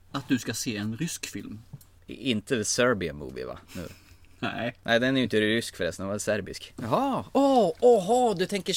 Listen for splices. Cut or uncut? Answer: cut